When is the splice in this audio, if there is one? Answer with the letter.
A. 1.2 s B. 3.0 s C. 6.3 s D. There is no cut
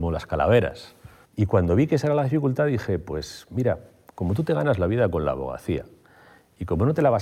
A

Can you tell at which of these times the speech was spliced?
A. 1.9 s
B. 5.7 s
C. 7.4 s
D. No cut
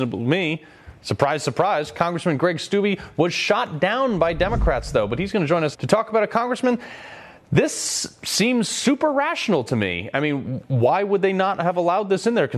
B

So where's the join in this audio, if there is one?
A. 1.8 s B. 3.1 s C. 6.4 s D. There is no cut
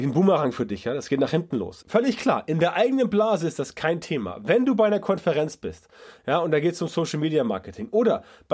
A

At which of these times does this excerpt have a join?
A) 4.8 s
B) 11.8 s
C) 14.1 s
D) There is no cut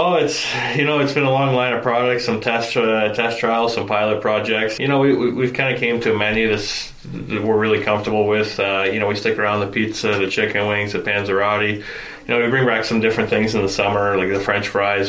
A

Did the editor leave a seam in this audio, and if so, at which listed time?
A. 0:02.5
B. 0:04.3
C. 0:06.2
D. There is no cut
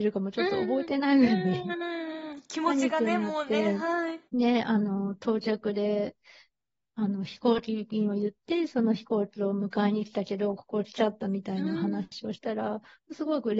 B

